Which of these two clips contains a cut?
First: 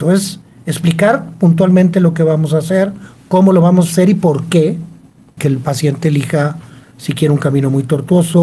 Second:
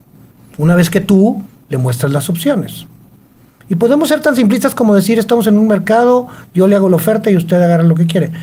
first; 1 cut; at 5.4 s

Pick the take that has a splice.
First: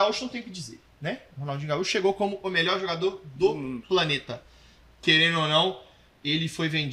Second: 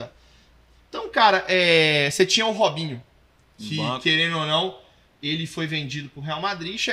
first; 1 cut; at 5.0 s

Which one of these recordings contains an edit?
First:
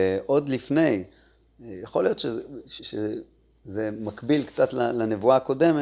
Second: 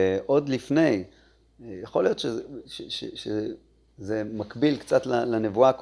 first; 1 cut; at 2.8 s

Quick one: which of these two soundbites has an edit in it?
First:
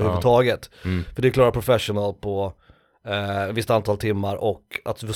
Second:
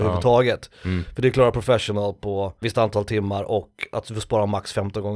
second; 1 cut; at 2.6 s

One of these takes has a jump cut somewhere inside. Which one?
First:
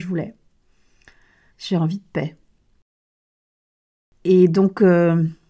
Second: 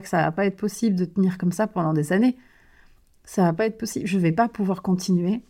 first; 1 cut; at 1.5 s

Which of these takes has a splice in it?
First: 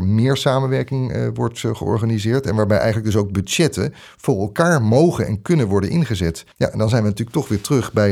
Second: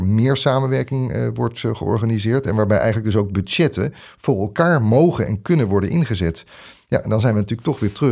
first; 1 cut; at 6.5 s

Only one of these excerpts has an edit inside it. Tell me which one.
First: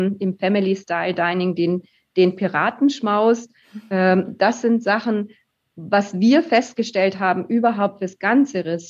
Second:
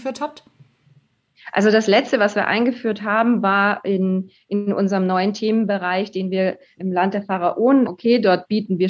second; 2 cuts; at 6.8 s, 7.9 s

